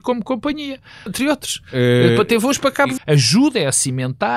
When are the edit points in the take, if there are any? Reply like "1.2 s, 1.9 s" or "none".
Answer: 1.1 s, 3.0 s